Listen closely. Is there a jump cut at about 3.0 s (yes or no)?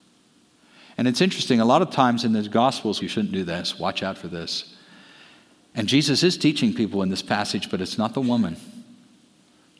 yes